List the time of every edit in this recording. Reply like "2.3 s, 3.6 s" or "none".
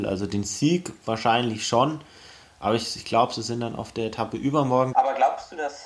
4.9 s